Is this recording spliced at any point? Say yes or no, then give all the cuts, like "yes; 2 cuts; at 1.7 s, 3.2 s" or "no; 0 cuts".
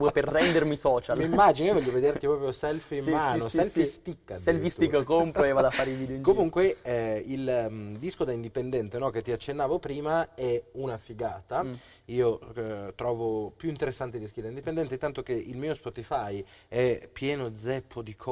no; 0 cuts